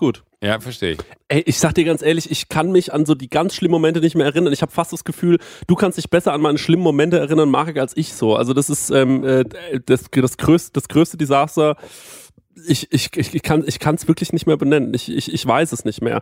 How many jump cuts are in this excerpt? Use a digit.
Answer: 0